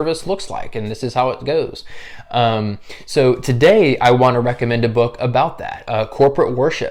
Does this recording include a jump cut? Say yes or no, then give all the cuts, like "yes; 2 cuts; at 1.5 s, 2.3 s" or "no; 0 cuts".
no; 0 cuts